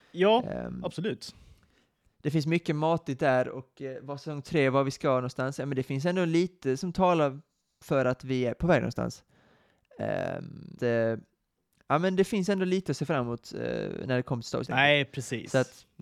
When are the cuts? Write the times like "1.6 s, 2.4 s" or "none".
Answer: 10.8 s, 14.6 s